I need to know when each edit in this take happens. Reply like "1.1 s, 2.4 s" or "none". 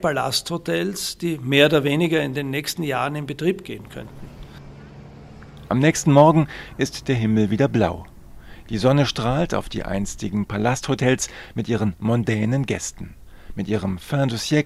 none